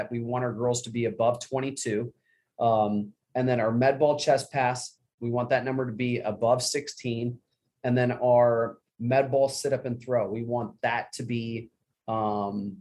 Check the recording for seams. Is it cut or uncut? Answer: cut